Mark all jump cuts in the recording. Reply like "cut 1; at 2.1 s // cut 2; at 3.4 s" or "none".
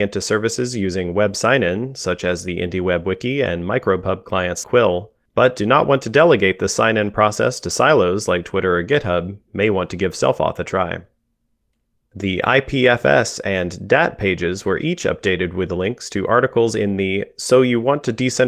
cut 1; at 4.6 s